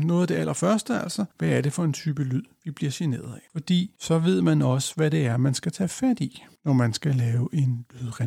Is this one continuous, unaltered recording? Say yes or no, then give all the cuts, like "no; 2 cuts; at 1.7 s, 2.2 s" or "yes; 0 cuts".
no; 2 cuts; at 1.3 s, 3.5 s